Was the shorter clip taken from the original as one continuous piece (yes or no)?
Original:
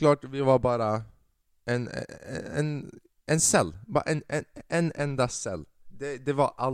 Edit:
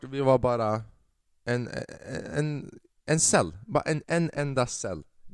no